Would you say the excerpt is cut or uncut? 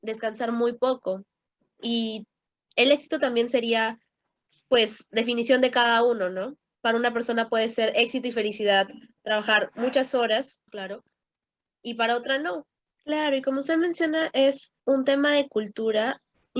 cut